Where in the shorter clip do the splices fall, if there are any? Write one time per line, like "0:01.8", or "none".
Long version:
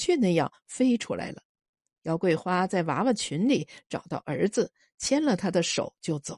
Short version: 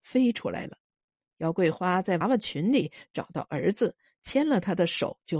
0:02.2